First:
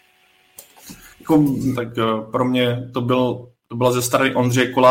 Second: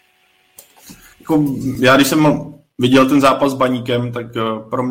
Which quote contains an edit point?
first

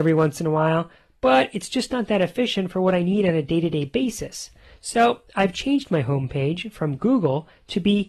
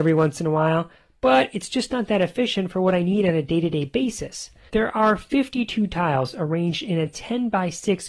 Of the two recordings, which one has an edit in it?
second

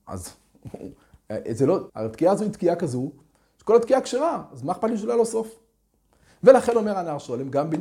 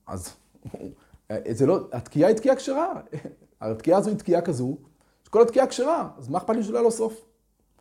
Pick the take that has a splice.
first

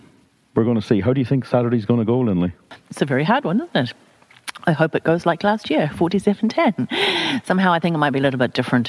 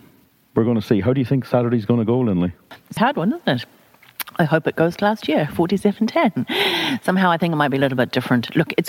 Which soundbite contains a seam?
second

